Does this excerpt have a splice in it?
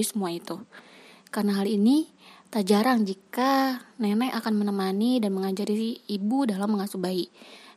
no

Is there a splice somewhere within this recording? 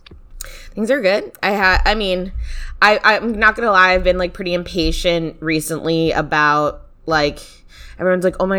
no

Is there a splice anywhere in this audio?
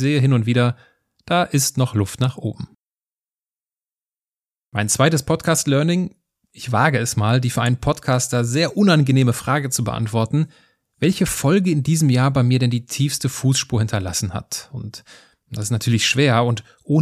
no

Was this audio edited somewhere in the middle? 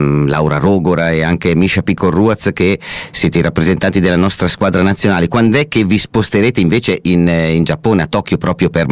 no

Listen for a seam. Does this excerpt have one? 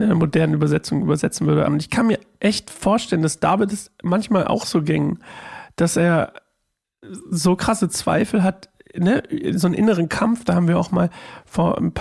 yes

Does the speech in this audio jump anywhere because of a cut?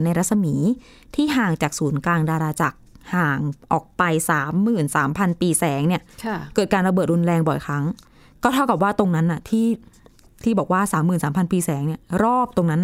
no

